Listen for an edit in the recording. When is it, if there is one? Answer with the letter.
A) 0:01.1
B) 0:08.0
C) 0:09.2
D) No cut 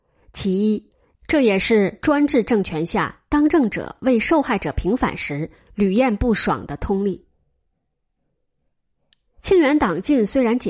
A